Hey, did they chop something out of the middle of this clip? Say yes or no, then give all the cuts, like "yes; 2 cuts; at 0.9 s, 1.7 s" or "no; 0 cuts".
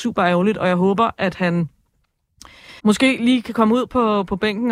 yes; 1 cut; at 2.8 s